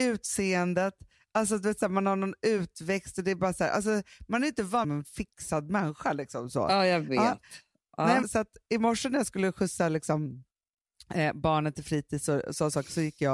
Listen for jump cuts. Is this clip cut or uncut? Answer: cut